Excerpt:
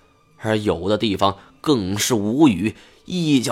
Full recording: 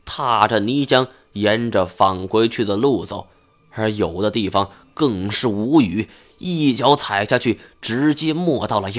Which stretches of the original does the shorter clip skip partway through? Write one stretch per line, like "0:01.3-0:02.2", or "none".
none